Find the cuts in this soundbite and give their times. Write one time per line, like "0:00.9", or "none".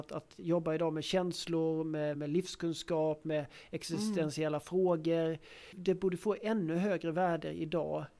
none